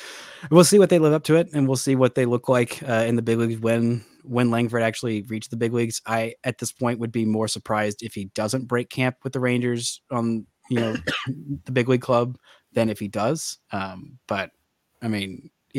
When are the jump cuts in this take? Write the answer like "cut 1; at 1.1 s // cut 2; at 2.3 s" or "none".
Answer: none